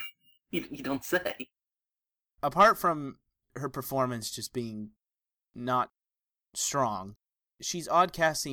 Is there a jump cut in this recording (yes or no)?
no